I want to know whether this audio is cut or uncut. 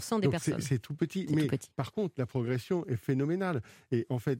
uncut